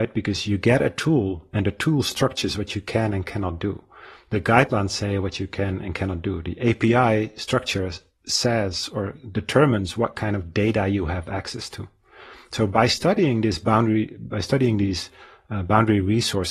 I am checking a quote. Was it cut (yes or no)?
no